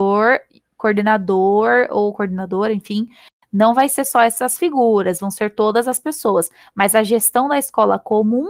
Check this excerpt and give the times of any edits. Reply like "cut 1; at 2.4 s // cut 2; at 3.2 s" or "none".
none